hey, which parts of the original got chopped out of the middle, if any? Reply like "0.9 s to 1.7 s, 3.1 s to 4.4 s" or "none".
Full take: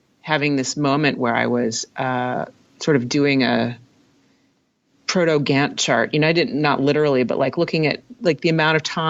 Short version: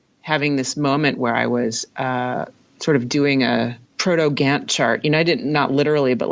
3.9 s to 4.9 s